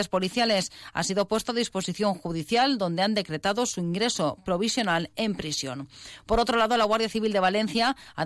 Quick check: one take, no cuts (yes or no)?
yes